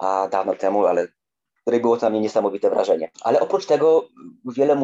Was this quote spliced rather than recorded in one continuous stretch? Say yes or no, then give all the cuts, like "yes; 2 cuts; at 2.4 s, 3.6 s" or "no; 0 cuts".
yes; 1 cut; at 3.1 s